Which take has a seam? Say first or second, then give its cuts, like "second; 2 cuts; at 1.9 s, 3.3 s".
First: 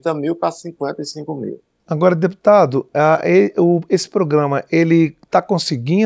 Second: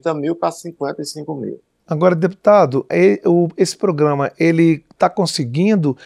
second; 1 cut; at 2.9 s